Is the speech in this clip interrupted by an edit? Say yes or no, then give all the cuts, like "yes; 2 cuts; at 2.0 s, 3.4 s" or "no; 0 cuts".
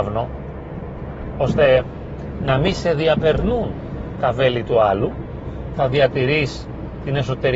yes; 1 cut; at 5.7 s